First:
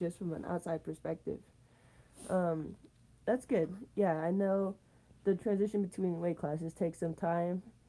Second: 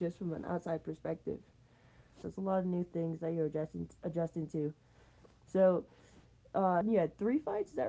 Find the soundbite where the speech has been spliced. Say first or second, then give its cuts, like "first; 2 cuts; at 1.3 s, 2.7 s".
second; 2 cuts; at 2.2 s, 6.8 s